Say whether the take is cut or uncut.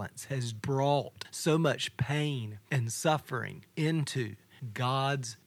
uncut